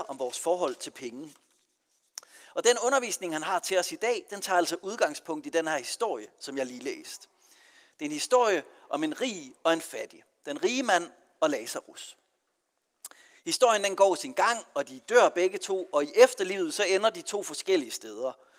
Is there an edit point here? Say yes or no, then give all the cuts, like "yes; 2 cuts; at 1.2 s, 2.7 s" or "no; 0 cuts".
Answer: no; 0 cuts